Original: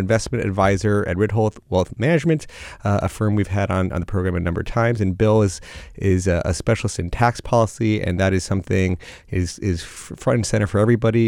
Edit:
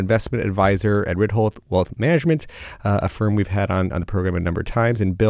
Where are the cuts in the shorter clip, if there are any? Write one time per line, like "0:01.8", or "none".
none